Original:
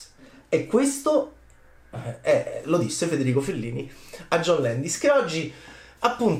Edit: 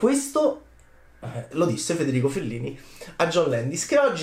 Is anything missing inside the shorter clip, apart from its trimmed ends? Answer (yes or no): yes